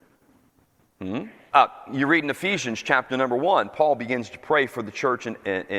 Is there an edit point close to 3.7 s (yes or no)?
no